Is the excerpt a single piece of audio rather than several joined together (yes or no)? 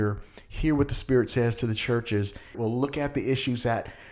no